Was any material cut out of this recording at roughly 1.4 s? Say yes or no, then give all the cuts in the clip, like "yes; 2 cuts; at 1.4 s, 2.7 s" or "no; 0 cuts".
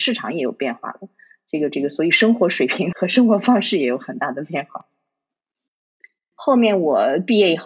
no; 2 cuts; at 2.9 s, 6.3 s